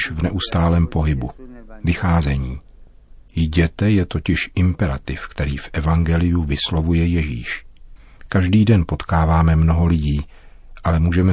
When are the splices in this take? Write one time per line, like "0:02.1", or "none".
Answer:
none